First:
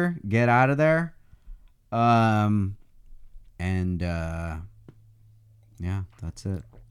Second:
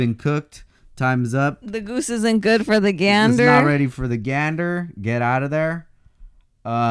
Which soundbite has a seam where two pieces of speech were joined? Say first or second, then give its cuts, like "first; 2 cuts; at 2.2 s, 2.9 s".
first; 1 cut; at 3.5 s